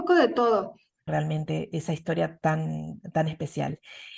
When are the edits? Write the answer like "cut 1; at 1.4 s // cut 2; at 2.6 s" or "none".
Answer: cut 1; at 1.1 s